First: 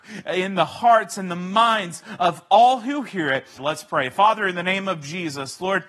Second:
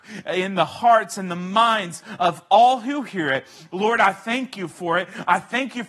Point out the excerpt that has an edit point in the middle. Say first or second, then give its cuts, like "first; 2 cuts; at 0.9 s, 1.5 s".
first; 1 cut; at 3.6 s